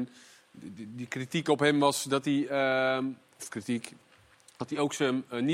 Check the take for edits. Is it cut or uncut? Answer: uncut